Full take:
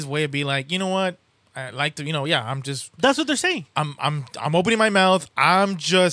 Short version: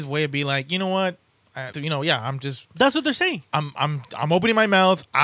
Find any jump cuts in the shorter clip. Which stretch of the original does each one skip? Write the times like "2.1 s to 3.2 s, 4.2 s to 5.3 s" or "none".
1.7 s to 1.9 s

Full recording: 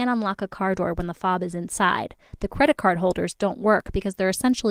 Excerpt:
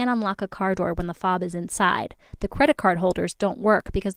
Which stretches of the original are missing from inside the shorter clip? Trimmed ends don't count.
none

